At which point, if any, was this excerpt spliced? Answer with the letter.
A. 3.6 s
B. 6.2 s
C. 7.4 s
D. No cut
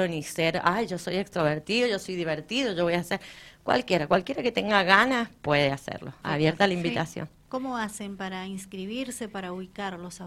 B